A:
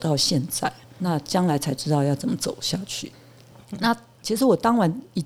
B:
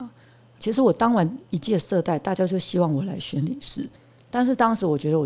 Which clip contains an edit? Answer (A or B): A